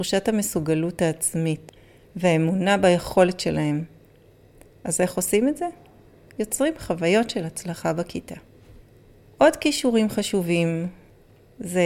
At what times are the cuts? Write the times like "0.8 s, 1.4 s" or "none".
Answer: none